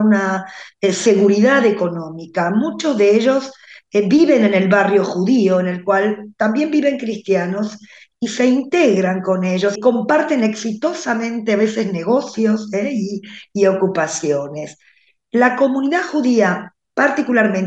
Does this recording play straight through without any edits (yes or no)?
no